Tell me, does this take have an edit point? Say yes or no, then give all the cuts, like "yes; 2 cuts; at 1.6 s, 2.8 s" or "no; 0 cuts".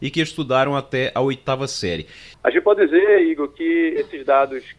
yes; 1 cut; at 2.3 s